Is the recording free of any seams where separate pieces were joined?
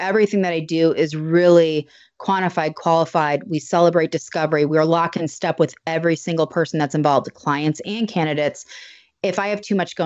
yes; 0 cuts

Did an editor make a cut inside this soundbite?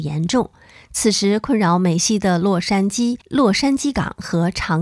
yes; 1 cut; at 3.2 s

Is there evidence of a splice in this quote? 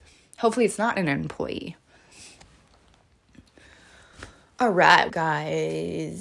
yes; 1 cut; at 5.1 s

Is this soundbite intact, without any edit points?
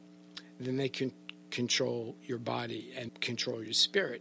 no; 1 cut; at 3.1 s

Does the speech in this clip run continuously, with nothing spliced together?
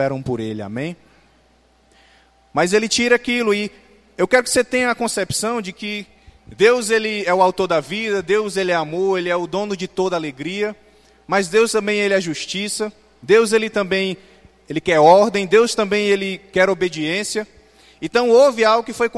yes; 0 cuts

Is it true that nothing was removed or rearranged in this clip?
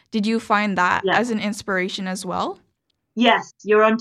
yes; 0 cuts

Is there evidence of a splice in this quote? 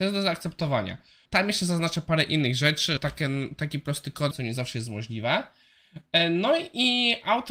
yes; 3 cuts; at 1.3 s, 3.0 s, 4.3 s

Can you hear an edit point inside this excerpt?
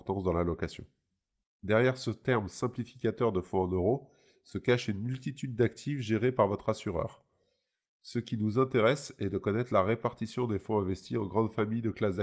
yes; 1 cut; at 1.4 s

